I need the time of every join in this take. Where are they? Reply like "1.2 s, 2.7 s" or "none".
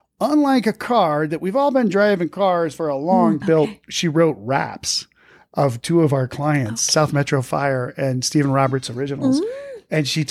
3.4 s